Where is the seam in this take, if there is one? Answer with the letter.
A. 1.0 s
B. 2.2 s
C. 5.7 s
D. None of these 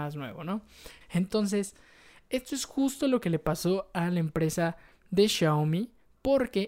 A